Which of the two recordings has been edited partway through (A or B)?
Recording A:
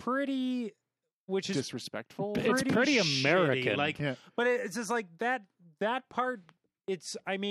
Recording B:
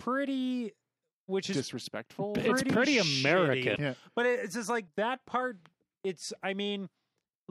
B